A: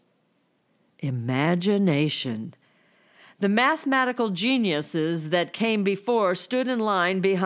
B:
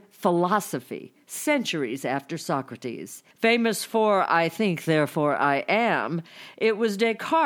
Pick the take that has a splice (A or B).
B